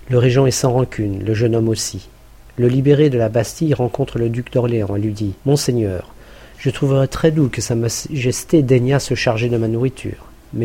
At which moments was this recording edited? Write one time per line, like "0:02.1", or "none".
0:05.4